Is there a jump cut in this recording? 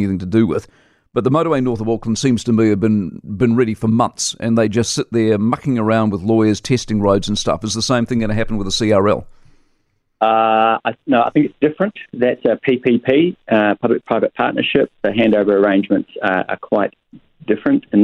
no; 0 cuts

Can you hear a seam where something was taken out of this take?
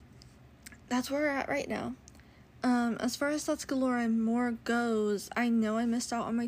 no; 0 cuts

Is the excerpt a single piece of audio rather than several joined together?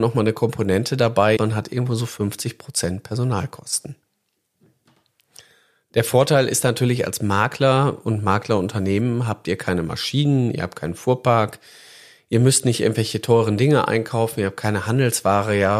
no; 1 cut; at 1.4 s

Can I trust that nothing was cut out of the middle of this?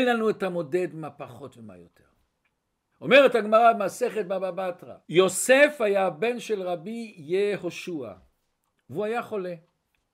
no; 2 cuts; at 2.9 s, 5.0 s

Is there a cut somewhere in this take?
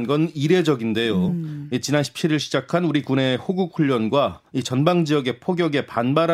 no; 0 cuts

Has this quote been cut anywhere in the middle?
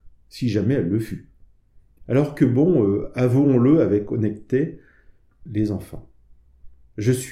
yes; 2 cuts; at 2.0 s, 5.5 s

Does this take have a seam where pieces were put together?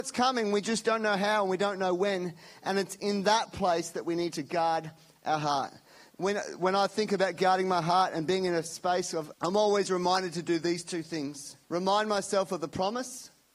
yes; 3 cuts; at 6.1 s, 9.3 s, 11.6 s

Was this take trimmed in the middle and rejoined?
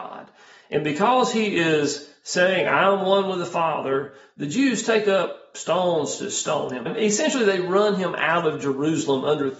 yes; 1 cut; at 6.9 s

